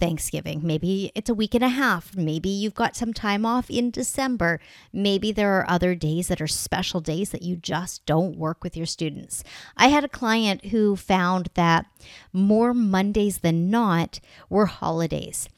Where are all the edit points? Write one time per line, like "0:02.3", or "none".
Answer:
none